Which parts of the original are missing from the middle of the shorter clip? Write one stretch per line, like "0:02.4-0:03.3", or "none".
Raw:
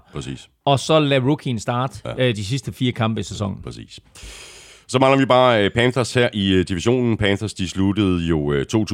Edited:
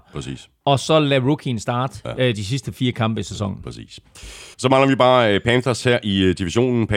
0:04.5-0:04.8